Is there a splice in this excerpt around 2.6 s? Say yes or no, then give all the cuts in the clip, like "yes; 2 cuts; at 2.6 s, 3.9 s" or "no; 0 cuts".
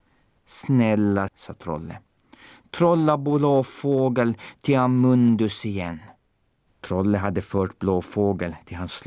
no; 2 cuts; at 1.3 s, 6.7 s